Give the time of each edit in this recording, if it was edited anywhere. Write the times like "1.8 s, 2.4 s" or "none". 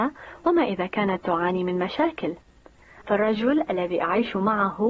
3.0 s